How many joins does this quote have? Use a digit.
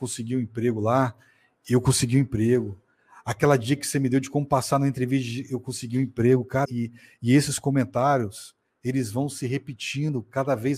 1